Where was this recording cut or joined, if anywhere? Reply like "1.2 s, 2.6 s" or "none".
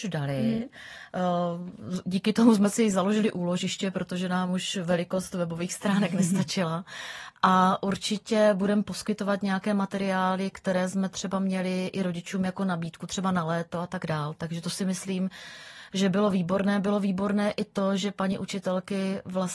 none